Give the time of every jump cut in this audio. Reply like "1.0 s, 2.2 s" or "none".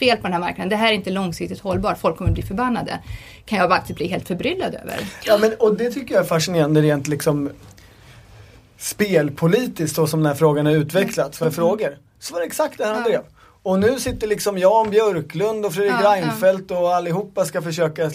11.4 s